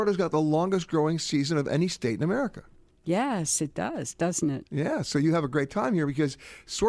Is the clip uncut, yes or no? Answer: yes